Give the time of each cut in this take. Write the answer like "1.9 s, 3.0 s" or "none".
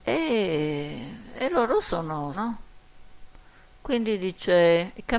2.3 s